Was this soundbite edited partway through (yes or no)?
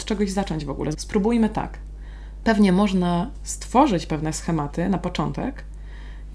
yes